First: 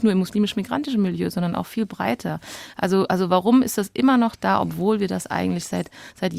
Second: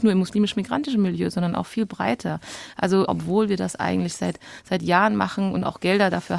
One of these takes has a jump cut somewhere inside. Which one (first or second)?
second